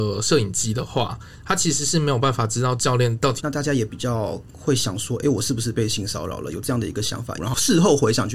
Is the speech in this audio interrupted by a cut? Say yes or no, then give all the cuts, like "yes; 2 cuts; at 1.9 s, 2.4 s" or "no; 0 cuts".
yes; 2 cuts; at 3.4 s, 7.4 s